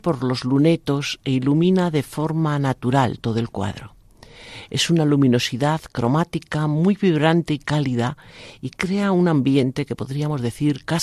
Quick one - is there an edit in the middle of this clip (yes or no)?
no